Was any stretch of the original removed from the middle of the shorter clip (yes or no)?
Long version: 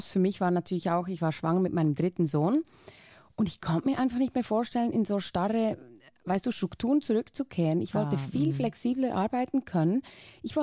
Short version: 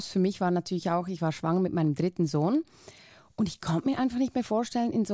no